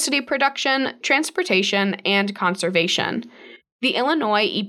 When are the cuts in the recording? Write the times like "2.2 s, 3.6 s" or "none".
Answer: 1.0 s, 3.6 s